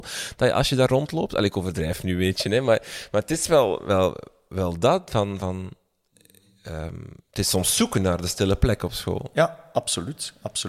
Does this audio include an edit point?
no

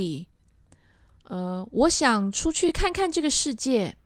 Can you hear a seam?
no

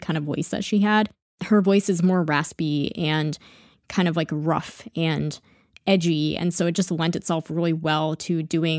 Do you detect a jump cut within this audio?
no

